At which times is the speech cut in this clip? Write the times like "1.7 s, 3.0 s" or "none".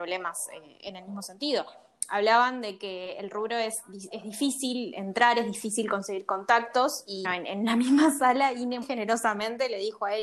7.2 s, 8.8 s